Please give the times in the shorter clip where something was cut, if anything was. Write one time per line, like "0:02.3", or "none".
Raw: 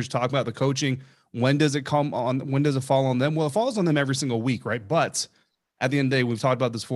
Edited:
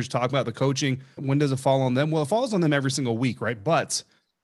0:01.2